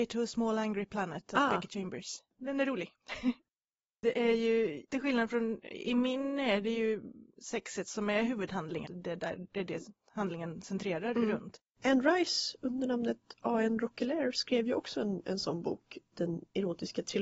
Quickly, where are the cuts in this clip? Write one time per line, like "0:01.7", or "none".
0:08.9